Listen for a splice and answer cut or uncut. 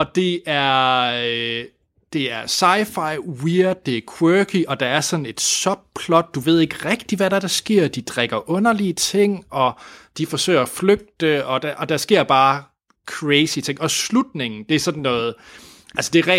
uncut